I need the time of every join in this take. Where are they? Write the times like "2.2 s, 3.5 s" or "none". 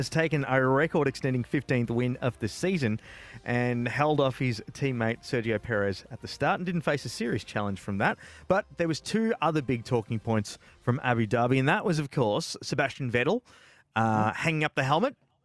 none

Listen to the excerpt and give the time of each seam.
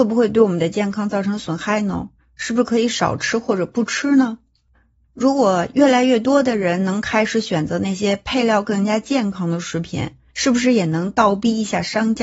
none

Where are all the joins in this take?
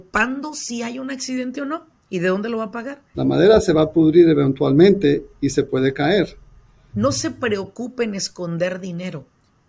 3.1 s, 6.9 s

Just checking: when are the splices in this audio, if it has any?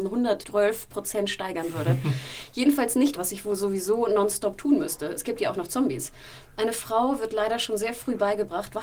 3.2 s

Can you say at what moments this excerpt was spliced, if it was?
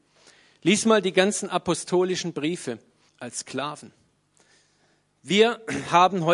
3.1 s

